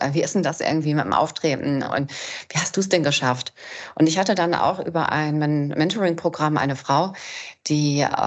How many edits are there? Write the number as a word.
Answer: zero